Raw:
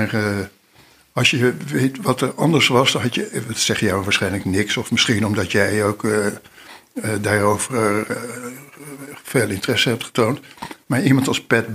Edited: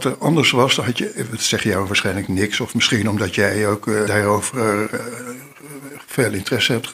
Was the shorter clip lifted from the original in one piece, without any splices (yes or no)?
no